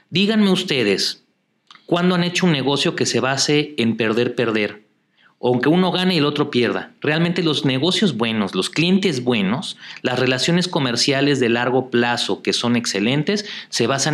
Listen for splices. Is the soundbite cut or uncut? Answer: uncut